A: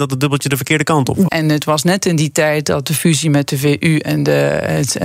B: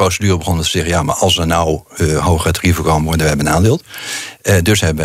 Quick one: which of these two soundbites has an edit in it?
A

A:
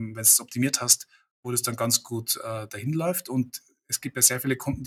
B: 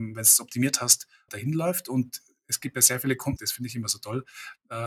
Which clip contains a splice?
B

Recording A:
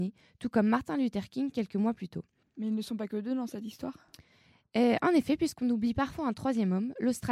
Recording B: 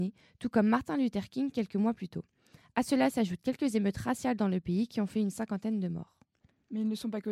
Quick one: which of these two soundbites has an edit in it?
A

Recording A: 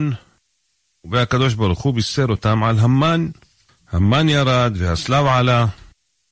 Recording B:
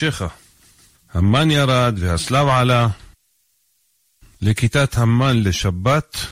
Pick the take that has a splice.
B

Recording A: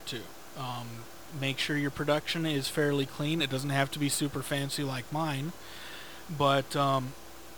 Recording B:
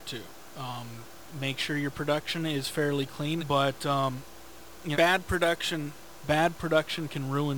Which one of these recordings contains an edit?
B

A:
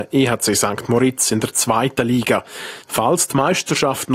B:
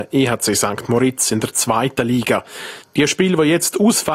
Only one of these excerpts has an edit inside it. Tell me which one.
A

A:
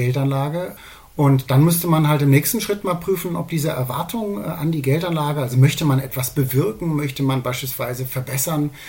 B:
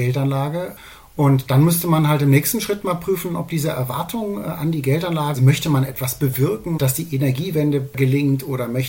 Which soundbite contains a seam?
B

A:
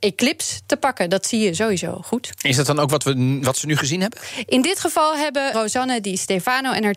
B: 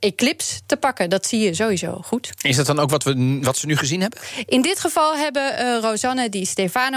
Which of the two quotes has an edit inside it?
A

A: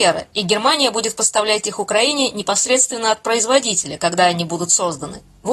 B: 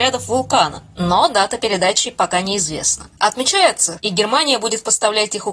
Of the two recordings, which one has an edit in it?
B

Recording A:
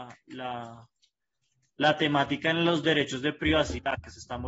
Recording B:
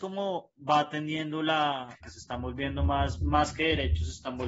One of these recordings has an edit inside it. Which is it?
B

